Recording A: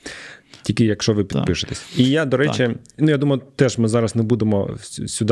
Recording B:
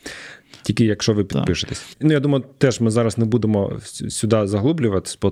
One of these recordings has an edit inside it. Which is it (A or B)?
B